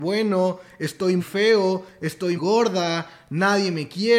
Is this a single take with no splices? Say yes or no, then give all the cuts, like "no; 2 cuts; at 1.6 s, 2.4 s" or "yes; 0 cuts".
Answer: no; 2 cuts; at 1.2 s, 2.4 s